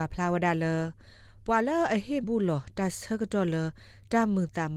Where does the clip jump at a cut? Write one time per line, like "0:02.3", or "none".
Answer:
0:02.2